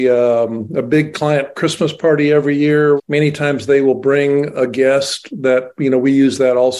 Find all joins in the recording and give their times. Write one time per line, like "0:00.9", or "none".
0:03.0